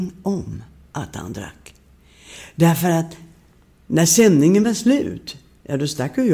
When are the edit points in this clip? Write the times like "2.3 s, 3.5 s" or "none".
none